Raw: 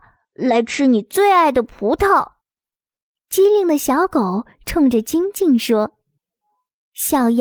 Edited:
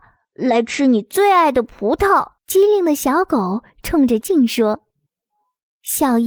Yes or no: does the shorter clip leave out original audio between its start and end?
yes